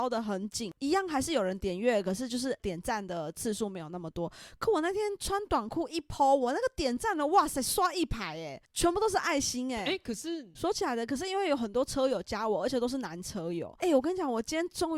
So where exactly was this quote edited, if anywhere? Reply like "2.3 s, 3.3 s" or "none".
10.6 s, 13.8 s